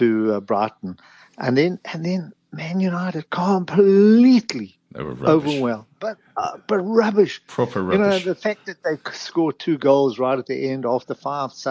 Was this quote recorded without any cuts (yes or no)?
yes